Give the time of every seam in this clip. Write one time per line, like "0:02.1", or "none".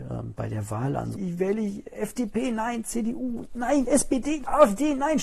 0:01.1